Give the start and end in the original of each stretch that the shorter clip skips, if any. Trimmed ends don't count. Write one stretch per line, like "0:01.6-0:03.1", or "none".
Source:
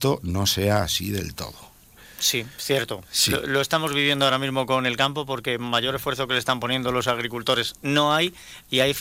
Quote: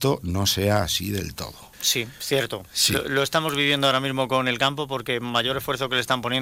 0:01.7-0:02.1